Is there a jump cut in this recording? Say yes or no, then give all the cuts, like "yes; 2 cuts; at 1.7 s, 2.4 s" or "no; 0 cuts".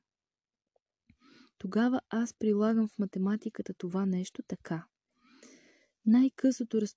no; 0 cuts